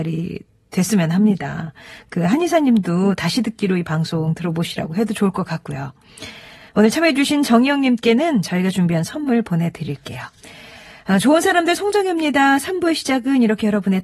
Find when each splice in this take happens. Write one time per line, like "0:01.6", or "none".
none